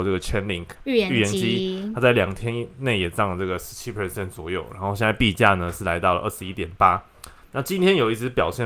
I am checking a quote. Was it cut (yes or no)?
no